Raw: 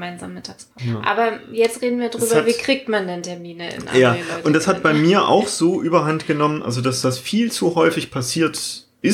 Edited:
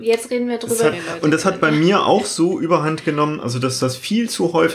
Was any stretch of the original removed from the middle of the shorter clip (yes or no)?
yes